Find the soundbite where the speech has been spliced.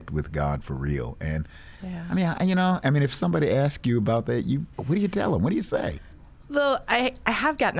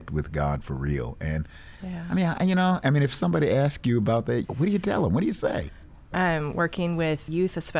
second; 2 cuts; at 4.4 s, 6.1 s

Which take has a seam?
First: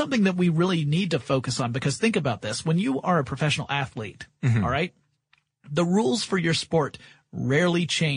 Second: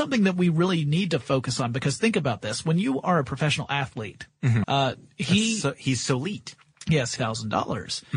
second; 2 cuts; at 4.6 s, 7.2 s

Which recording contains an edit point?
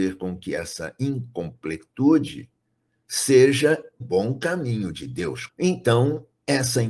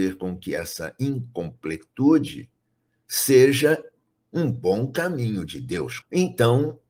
first; 1 cut; at 4.0 s

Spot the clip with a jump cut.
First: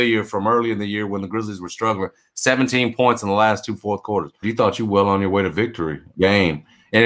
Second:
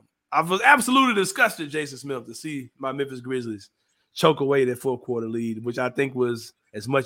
first; 2 cuts; at 4.4 s, 6.1 s

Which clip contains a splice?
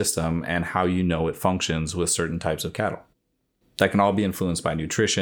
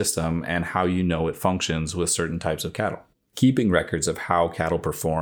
second; 1 cut; at 3.2 s

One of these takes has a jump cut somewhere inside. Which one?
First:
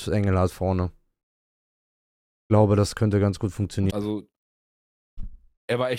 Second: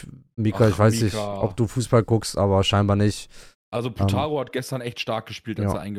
first; 1 cut; at 3.9 s

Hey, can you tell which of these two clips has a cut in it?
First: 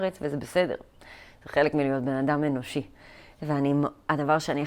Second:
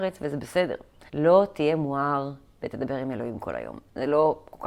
second; 1 cut; at 1.1 s

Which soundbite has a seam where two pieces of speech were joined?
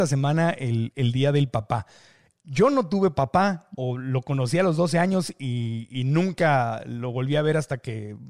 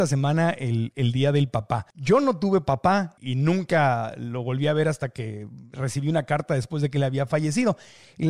second; 2 cuts; at 1.9 s, 3.2 s

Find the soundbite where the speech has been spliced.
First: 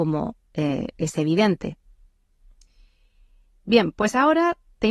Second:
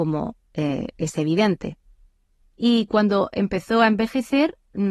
second; 1 cut; at 2.4 s

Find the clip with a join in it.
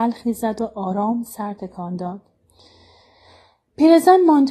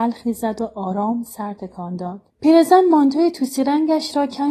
second; 1 cut; at 2.3 s

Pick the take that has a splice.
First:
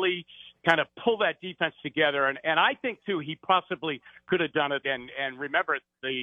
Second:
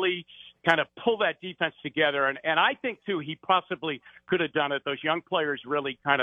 first; 1 cut; at 4.8 s

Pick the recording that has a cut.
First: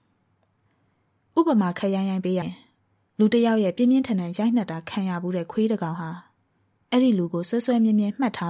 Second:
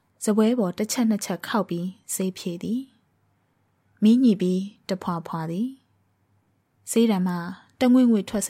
first; 1 cut; at 2.4 s

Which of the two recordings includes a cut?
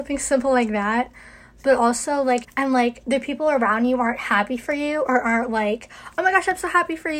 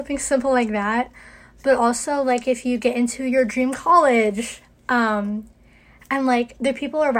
first; 1 cut; at 2.4 s

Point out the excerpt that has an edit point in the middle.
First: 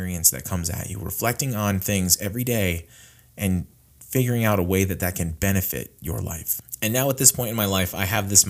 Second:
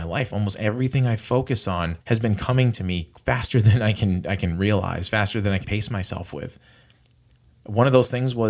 second; 2 cuts; at 2.0 s, 5.6 s

